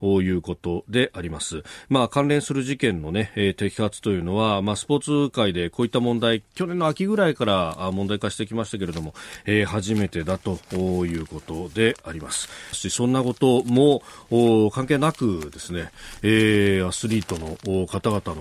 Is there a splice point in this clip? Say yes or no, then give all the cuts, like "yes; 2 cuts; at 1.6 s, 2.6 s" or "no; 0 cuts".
yes; 1 cut; at 12.7 s